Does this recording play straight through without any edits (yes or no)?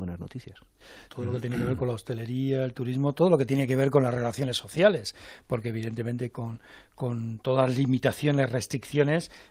no